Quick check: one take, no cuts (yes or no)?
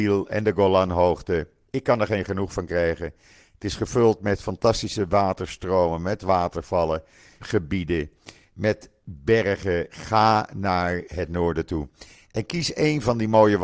no